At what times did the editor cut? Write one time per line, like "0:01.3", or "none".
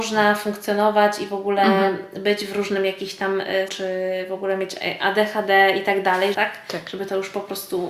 0:03.7
0:06.3

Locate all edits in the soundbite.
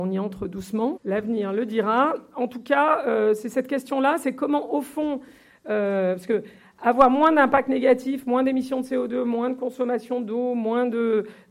0:01.0

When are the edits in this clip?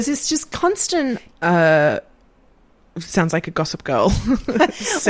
0:01.3

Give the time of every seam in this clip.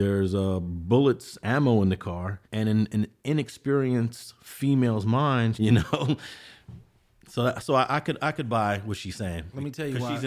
0:02.4
0:05.5

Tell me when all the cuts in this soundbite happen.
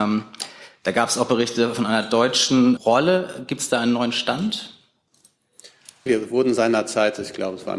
0:02.8
0:06.1

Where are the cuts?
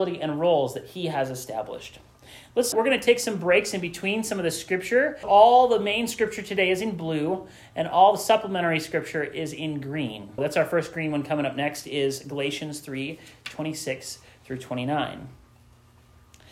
0:02.7
0:05.2
0:10.4

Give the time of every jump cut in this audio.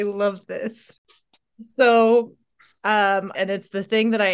0:03.3

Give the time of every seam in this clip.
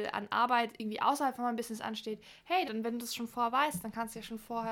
0:02.6

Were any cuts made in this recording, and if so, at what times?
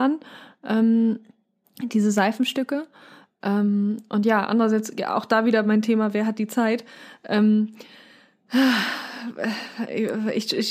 none

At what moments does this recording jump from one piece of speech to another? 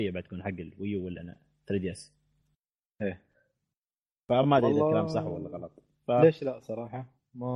none

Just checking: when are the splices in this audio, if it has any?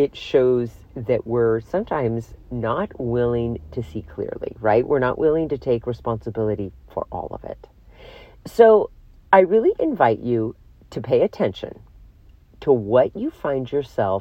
none

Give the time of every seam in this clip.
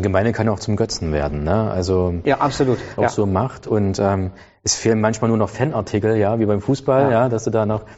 0:03.0

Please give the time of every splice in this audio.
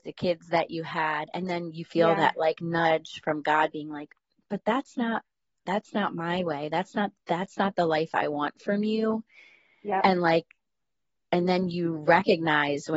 none

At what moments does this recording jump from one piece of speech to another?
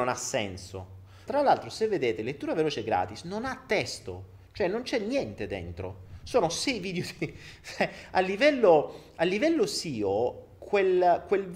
0:01.3

